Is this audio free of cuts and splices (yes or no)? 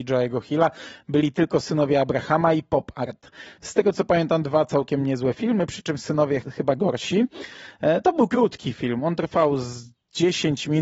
no